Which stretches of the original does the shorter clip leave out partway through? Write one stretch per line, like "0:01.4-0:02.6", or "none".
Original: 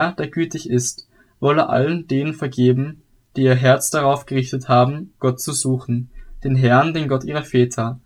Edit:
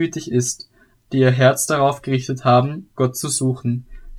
0:01.3-0:03.2